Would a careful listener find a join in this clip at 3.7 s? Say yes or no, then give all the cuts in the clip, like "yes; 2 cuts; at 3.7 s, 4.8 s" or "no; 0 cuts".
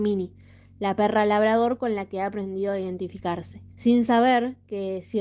yes; 1 cut; at 3.7 s